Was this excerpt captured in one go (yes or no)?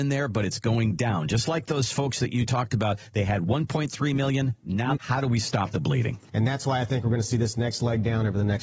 no